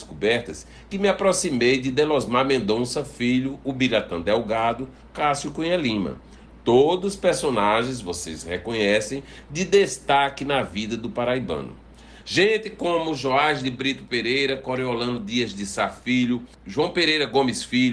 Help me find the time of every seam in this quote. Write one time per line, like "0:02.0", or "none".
0:12.2